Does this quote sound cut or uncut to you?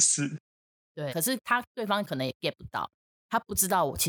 cut